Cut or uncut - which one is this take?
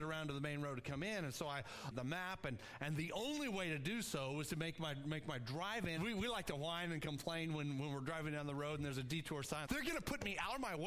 cut